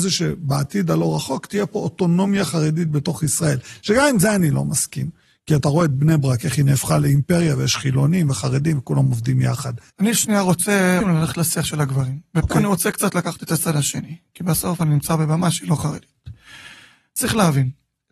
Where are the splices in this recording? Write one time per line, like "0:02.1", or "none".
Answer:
0:09.9
0:11.0